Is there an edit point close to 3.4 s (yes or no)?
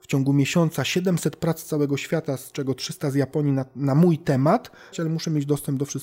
no